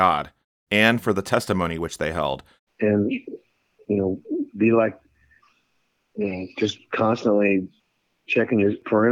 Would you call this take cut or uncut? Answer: cut